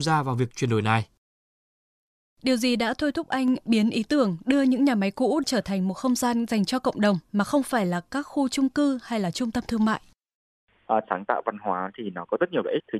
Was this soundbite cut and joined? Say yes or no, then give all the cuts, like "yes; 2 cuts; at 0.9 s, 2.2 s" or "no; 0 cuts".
yes; 1 cut; at 11.0 s